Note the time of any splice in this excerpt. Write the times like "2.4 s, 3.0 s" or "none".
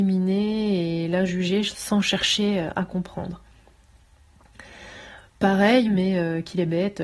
5.8 s